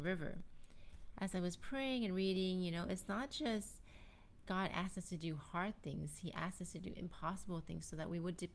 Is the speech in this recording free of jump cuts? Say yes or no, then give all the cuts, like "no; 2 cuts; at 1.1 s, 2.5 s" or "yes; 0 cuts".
no; 1 cut; at 1.1 s